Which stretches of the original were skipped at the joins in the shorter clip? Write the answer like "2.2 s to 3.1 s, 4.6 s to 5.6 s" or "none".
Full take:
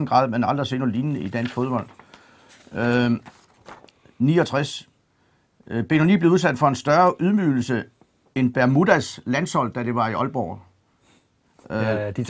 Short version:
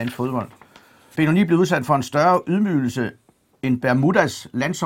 2.5 s to 5.9 s